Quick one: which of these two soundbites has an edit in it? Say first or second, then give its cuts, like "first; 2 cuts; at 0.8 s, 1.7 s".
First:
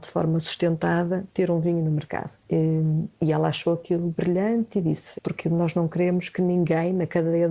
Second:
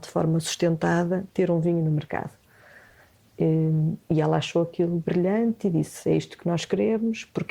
first; 2 cuts; at 2.4 s, 5.2 s